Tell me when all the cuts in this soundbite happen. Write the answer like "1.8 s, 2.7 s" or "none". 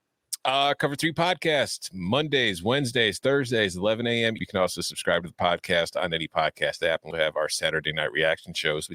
4.4 s, 7.1 s